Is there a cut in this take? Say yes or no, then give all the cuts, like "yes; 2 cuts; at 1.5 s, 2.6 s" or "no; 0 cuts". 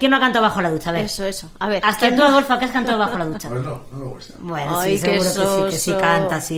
no; 0 cuts